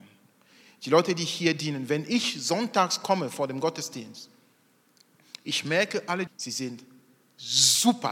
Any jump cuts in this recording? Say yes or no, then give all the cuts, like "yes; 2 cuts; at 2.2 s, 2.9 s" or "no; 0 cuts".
yes; 1 cut; at 6.3 s